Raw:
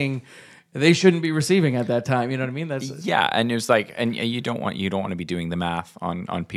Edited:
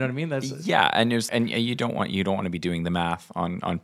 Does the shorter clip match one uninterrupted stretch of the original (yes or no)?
no